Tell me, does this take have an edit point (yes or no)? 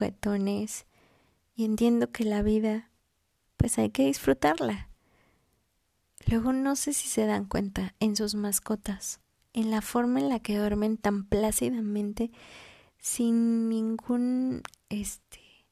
no